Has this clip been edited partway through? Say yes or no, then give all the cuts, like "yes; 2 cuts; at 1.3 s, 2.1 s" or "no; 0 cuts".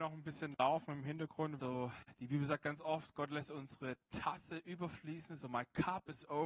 yes; 1 cut; at 1.6 s